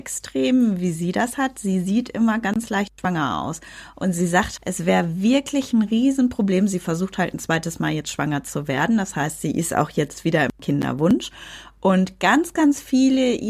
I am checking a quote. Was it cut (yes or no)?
yes